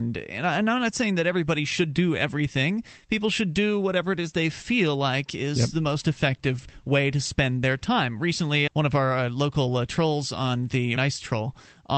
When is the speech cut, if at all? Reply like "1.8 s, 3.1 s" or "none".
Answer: 8.7 s, 11.0 s